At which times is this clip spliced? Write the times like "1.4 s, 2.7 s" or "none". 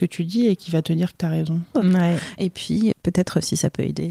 1.7 s, 2.9 s